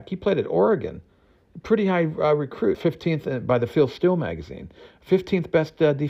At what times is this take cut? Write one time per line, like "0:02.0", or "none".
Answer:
0:02.7